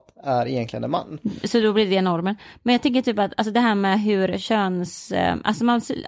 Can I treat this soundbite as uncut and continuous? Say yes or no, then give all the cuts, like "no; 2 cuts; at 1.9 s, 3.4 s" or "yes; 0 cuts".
yes; 0 cuts